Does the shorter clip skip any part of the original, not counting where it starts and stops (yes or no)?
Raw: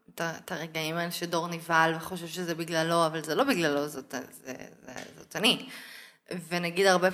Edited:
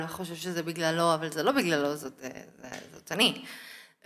yes